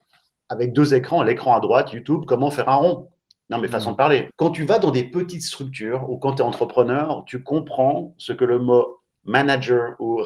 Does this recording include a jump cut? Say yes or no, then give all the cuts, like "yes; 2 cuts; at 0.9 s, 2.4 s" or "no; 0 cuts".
yes; 1 cut; at 4.3 s